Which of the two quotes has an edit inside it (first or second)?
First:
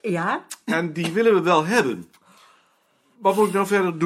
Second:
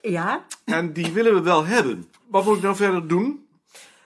second